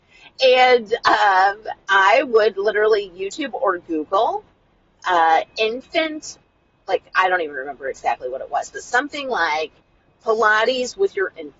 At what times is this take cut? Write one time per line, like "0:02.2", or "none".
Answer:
none